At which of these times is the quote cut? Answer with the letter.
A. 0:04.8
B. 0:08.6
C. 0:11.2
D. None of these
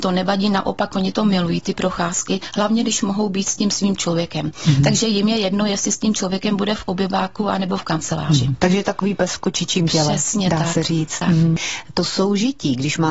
C